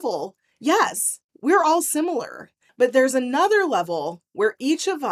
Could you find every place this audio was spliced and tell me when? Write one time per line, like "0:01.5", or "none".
0:01.3
0:02.7